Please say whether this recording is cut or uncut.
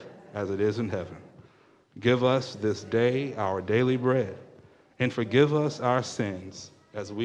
uncut